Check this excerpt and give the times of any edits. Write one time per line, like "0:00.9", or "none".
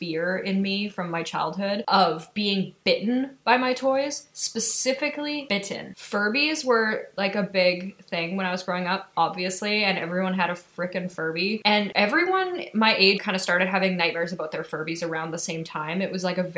0:13.2